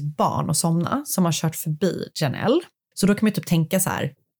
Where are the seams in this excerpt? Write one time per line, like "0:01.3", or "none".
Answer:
0:02.9

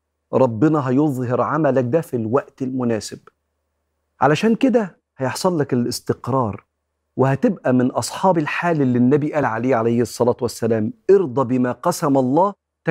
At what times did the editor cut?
none

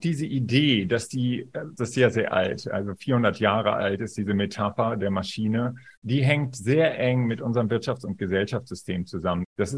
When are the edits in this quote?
0:01.8
0:06.0

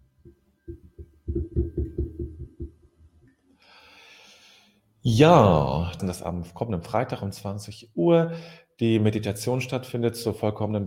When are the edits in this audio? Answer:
0:06.0

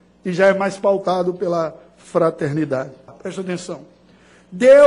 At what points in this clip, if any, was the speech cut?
0:03.1

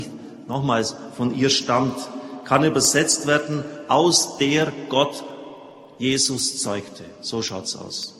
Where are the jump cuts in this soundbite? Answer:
none

